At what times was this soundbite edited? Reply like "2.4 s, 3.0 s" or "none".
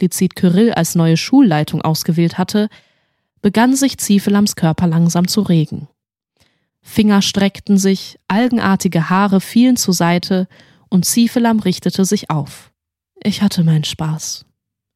13.1 s